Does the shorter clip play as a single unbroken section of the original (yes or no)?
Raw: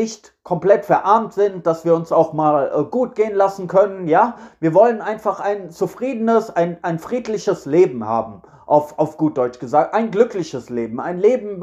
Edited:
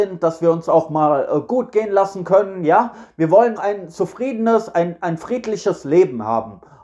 no